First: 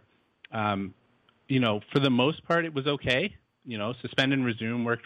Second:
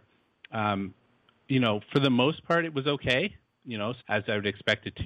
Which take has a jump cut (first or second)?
second